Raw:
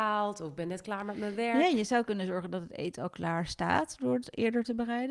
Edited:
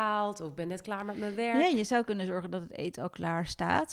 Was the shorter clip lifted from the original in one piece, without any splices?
yes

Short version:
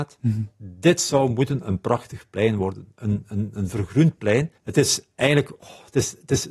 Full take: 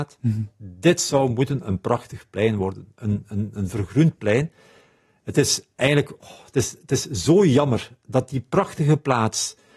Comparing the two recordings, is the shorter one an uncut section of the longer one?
no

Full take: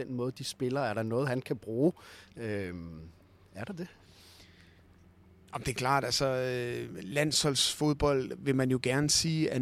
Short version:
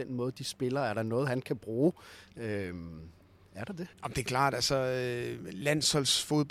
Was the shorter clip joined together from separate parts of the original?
yes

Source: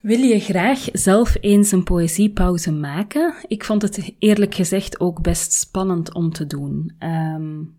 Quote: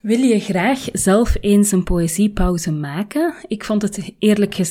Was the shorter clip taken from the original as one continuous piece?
yes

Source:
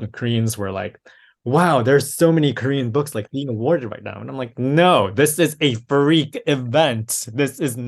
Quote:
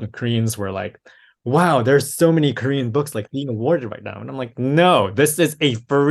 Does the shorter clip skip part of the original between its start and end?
no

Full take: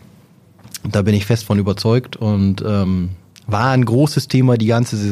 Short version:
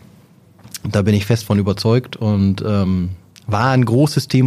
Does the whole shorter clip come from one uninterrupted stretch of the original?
yes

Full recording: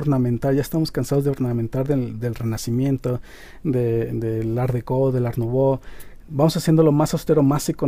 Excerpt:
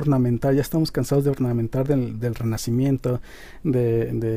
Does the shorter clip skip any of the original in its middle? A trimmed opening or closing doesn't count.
no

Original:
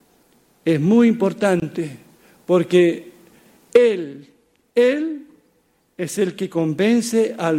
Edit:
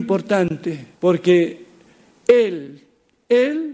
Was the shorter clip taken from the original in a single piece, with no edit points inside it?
no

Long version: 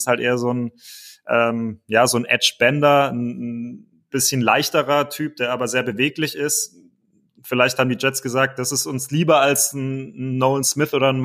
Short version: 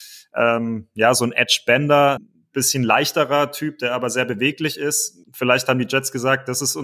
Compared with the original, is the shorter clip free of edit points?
no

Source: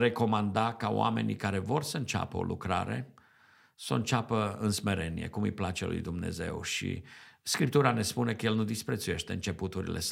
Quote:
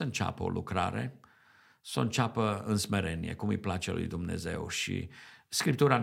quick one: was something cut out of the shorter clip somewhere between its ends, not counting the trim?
no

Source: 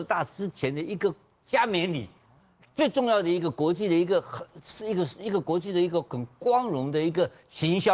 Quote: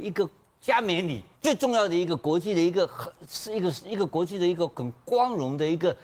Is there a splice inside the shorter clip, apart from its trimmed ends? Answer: yes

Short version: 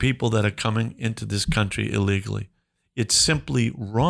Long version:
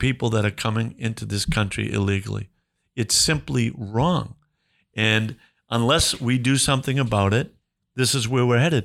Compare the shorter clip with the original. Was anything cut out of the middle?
no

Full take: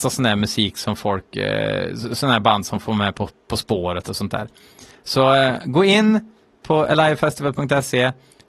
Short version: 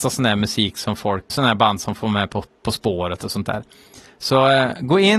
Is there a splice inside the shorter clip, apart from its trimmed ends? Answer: yes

